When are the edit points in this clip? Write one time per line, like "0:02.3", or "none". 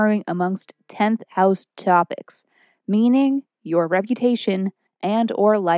0:04.9